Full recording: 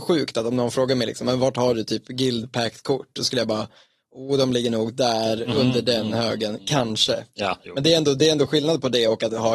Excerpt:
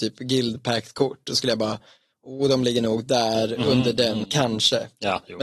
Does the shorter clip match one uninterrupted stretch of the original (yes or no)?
no